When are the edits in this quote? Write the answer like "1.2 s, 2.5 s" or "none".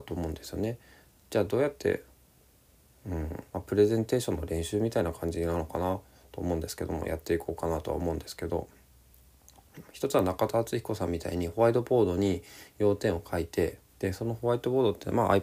3.5 s, 13.9 s